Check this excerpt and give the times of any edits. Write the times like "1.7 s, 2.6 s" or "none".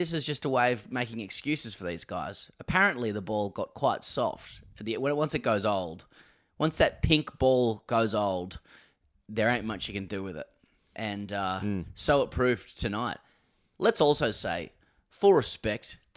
none